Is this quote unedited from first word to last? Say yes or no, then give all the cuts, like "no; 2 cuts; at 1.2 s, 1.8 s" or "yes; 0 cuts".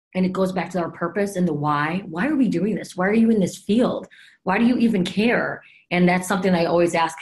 yes; 0 cuts